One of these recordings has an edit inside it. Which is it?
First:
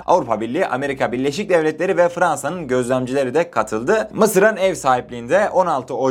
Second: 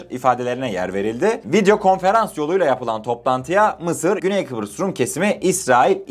second; 1 cut; at 4.2 s

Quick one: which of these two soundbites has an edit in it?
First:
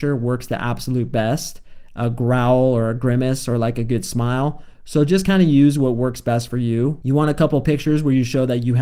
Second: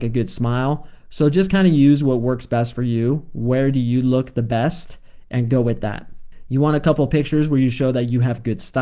first; 1 cut; at 7.0 s

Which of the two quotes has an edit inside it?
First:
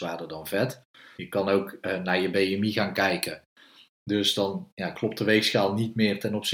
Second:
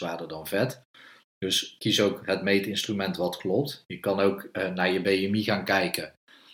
first; 2 cuts; at 1.2 s, 3.9 s

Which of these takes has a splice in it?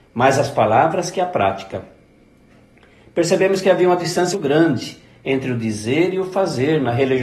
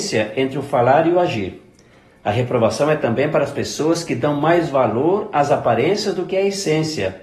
first; 1 cut; at 4.3 s

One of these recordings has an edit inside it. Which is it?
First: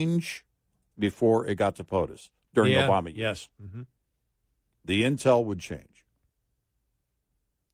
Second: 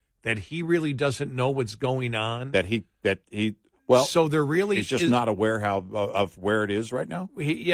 first; 1 cut; at 2.4 s

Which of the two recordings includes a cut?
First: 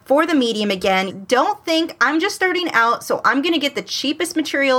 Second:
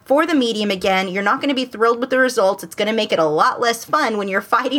first; 1 cut; at 1.1 s

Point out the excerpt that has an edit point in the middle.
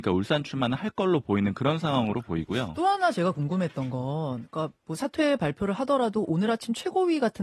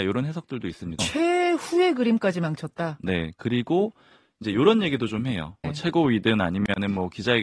second; 2 cuts; at 1.0 s, 5.6 s

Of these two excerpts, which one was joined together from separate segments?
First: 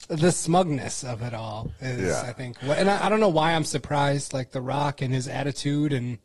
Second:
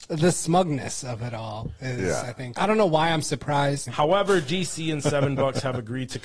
second; 2 cuts; at 2.6 s, 3.9 s

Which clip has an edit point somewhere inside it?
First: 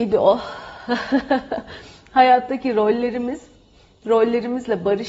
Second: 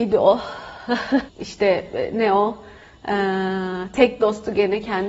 second; 1 cut; at 1.3 s

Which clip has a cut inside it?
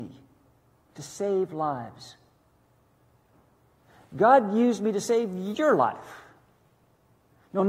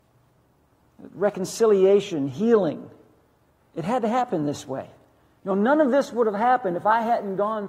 second; 1 cut; at 5.4 s

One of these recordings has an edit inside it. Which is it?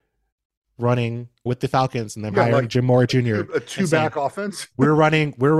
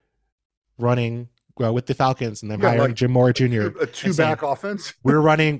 first; 1 cut; at 1.5 s

